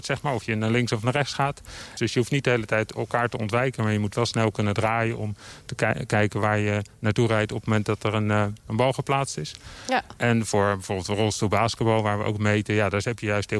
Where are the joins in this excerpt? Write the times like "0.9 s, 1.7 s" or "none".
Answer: 2.0 s